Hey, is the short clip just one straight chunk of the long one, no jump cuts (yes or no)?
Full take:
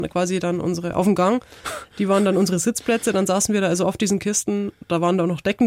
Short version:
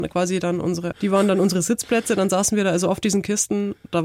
no